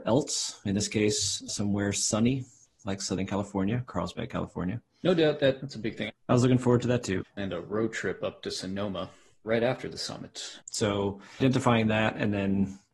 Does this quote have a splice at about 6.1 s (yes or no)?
yes